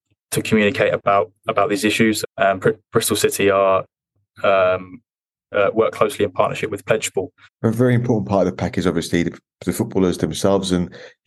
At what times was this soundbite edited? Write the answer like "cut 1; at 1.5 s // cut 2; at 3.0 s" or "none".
cut 1; at 2.2 s // cut 2; at 7.4 s